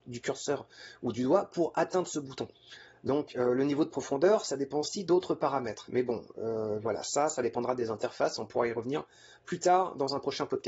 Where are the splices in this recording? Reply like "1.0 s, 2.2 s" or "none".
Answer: none